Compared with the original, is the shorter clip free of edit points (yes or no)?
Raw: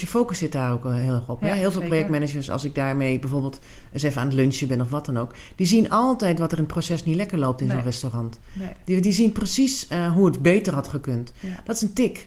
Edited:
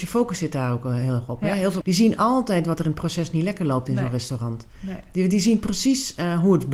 no